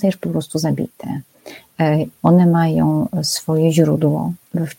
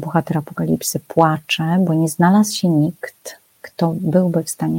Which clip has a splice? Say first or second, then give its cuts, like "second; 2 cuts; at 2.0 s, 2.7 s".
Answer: first; 1 cut; at 2.2 s